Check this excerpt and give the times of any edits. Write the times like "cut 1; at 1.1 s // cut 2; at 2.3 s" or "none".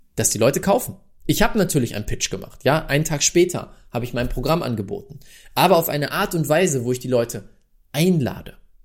none